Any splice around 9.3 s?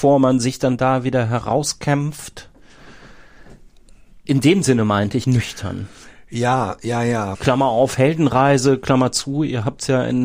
no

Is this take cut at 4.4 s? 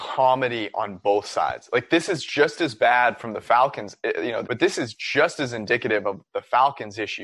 yes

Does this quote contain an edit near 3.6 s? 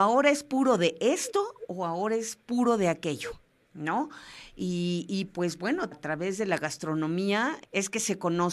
no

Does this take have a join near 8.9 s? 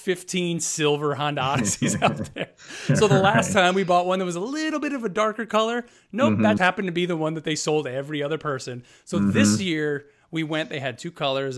no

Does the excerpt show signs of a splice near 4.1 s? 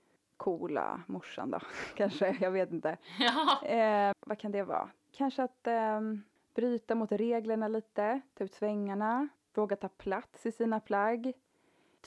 yes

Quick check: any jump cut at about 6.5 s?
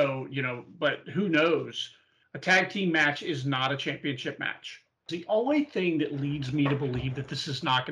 no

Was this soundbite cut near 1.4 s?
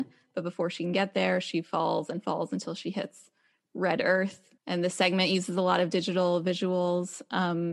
no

